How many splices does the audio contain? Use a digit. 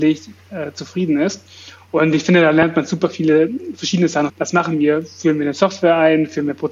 1